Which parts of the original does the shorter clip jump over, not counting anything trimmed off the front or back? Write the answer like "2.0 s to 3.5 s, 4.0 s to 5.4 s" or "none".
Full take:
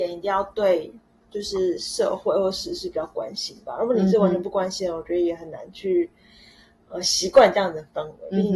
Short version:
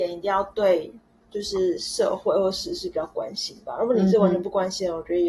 none